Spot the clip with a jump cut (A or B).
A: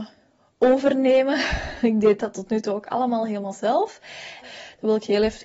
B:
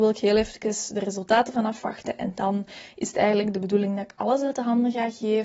A